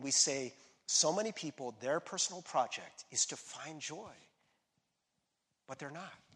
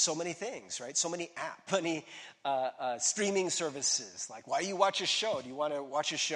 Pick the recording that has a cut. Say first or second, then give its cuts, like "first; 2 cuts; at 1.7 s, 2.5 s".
second; 1 cut; at 1.7 s